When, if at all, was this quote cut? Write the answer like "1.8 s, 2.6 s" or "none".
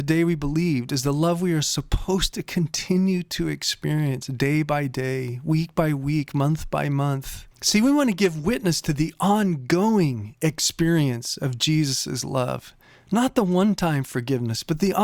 7.5 s